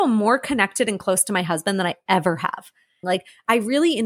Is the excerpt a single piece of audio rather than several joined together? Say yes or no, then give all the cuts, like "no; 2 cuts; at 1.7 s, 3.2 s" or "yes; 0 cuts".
no; 1 cut; at 3.0 s